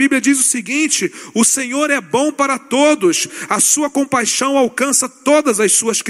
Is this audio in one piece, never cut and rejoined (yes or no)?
yes